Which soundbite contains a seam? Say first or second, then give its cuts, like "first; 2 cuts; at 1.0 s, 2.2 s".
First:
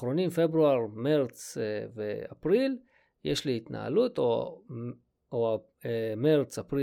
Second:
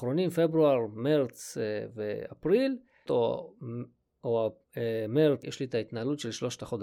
second; 2 cuts; at 3.1 s, 5.4 s